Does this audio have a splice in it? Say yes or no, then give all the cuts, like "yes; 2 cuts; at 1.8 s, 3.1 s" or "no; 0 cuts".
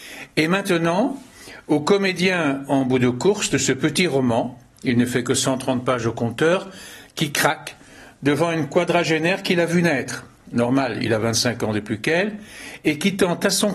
no; 0 cuts